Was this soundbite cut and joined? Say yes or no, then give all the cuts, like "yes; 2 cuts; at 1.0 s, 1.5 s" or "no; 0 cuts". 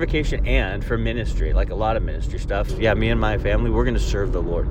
yes; 1 cut; at 2.7 s